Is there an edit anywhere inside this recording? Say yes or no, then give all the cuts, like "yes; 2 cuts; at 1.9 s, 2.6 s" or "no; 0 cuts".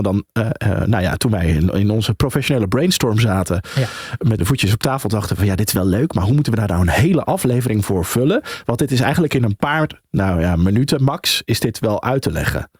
yes; 1 cut; at 4.4 s